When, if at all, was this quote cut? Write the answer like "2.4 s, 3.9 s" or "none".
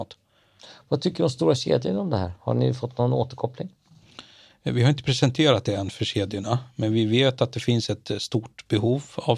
none